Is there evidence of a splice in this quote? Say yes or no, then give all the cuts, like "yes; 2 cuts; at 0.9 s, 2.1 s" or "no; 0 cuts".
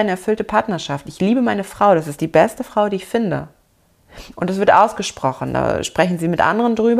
no; 0 cuts